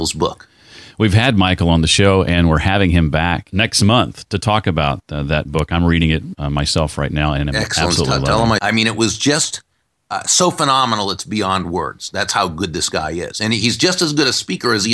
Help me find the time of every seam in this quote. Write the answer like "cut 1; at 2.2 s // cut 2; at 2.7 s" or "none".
cut 1; at 8.6 s